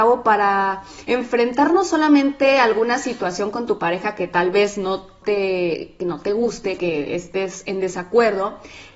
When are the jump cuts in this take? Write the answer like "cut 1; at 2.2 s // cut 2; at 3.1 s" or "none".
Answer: cut 1; at 6.8 s